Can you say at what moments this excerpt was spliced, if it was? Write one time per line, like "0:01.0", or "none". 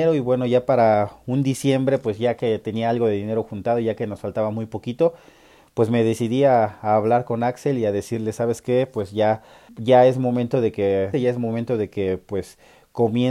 0:09.7
0:11.1